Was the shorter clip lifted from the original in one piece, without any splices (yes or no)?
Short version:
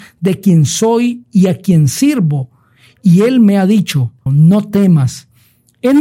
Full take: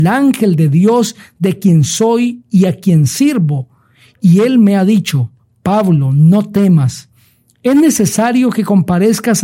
no